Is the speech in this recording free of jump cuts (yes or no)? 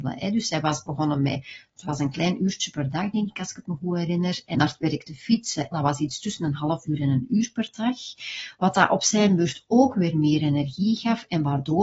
no